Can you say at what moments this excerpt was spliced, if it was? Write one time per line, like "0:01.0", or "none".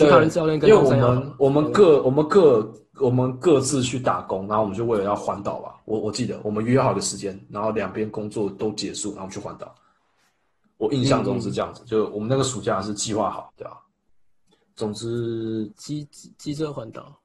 0:13.5
0:15.7

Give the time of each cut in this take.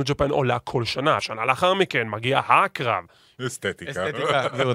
0:01.2
0:03.4

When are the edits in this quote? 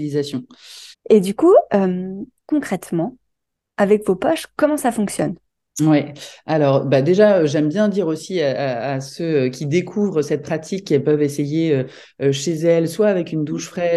0:00.9

